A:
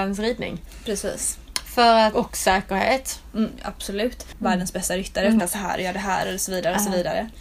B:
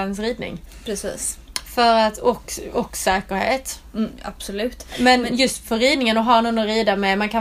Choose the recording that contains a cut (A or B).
A